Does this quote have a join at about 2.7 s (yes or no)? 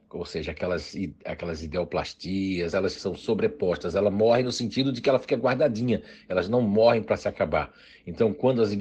yes